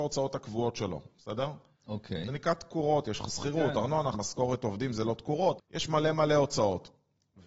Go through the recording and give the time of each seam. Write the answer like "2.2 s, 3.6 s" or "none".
4.1 s, 5.6 s

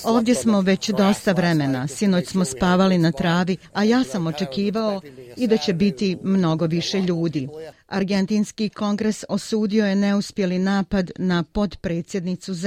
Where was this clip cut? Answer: 7.7 s

